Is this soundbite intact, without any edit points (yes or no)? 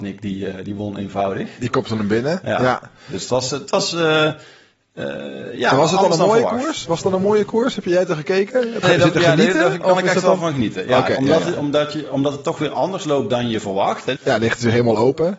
no